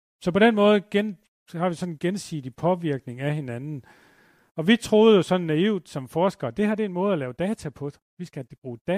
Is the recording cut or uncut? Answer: uncut